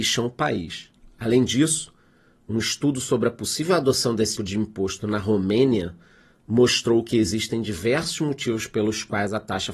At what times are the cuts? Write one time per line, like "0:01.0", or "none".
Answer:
0:04.3